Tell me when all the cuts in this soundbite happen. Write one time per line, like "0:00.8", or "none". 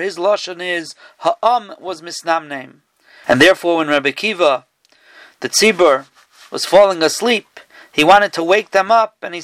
0:03.2

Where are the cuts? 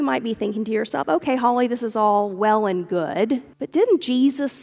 0:03.5

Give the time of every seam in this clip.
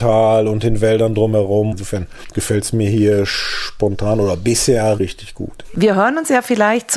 0:01.7
0:05.0

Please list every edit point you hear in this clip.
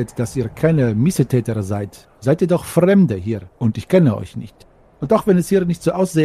none

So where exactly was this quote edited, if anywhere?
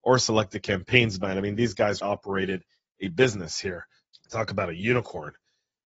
0:02.0
0:04.1

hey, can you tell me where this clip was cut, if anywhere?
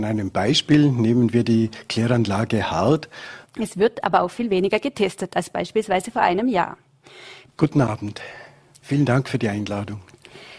0:03.4
0:07.5

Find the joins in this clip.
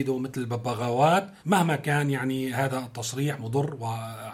0:01.4

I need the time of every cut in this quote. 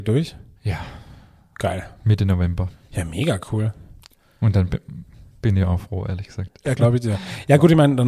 0:06.8

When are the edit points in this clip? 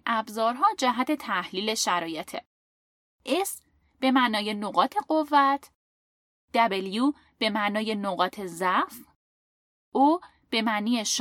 none

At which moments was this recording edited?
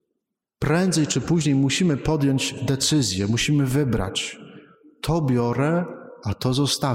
none

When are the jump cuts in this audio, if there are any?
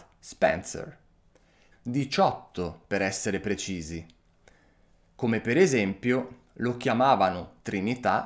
0:01.7

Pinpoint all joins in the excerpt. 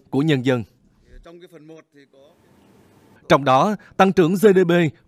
0:03.2

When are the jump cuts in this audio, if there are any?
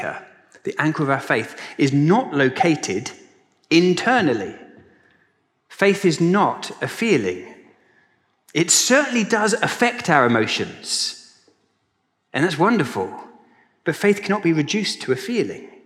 none

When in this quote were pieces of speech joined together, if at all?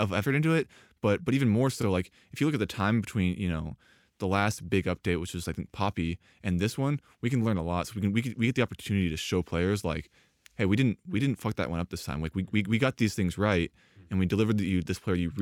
none

